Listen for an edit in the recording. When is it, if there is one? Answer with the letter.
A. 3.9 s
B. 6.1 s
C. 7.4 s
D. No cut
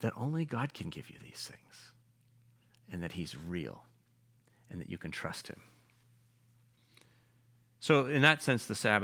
D